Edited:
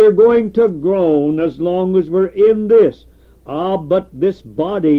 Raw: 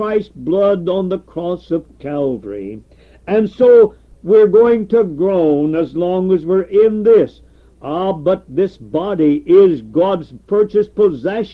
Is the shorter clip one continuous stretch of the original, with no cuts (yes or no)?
yes